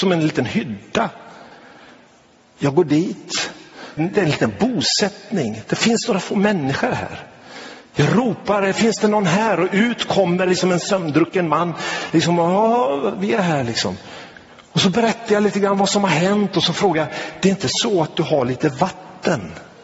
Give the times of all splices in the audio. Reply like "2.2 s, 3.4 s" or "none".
4.0 s